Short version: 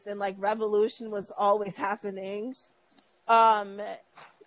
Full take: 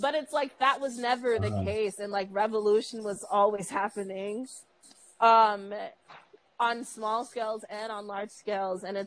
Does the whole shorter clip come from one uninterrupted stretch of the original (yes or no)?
yes